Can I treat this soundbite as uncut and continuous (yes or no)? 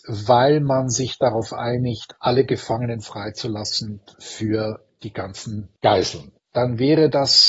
yes